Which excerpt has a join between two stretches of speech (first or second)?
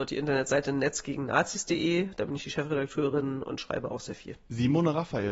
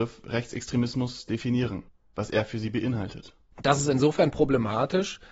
second